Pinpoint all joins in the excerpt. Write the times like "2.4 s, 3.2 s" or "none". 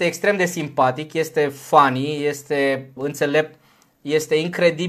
3.0 s